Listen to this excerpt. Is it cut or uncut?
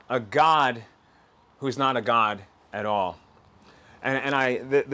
uncut